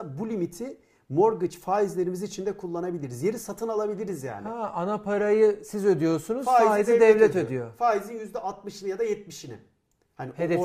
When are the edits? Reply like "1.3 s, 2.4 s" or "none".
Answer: none